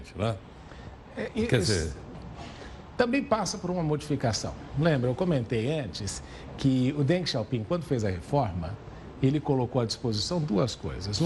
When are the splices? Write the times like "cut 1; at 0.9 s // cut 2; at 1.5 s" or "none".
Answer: none